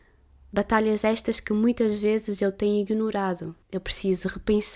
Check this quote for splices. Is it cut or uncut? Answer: cut